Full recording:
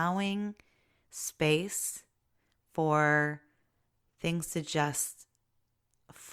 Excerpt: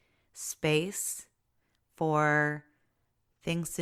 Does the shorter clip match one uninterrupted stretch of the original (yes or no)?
yes